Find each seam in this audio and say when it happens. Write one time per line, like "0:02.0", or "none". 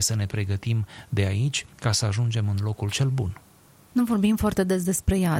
none